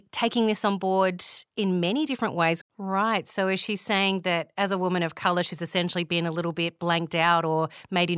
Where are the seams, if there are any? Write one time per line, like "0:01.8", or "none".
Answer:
0:02.6